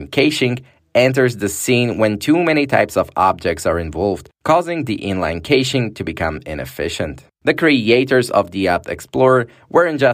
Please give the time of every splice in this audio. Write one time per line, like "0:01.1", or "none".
none